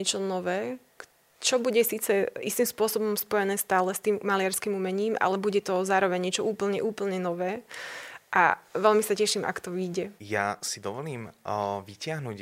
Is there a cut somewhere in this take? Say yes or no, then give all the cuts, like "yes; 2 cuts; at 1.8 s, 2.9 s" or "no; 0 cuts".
yes; 1 cut; at 10.2 s